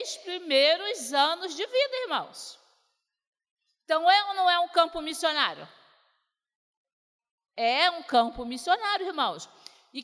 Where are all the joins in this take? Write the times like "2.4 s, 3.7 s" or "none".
none